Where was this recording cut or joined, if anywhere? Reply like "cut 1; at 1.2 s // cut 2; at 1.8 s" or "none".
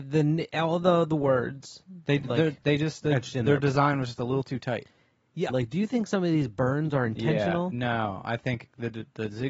cut 1; at 5.5 s